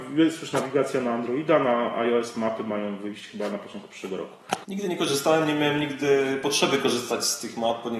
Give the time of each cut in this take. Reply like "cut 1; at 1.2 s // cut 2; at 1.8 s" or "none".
cut 1; at 4.6 s